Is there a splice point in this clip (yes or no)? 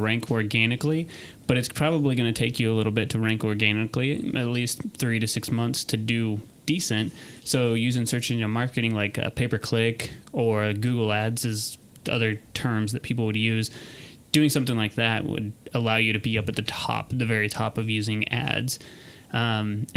no